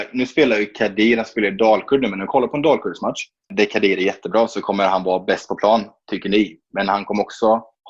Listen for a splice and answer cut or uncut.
uncut